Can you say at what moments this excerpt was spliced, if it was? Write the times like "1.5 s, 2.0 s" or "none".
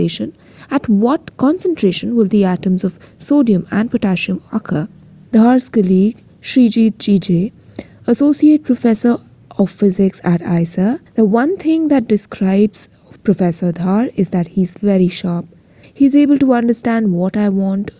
11.1 s, 15.8 s